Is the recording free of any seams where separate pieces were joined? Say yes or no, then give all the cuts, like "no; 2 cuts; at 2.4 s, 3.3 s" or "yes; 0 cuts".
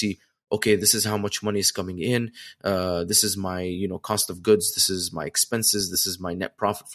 yes; 0 cuts